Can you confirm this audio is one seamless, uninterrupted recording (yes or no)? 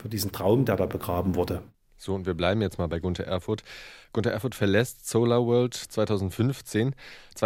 yes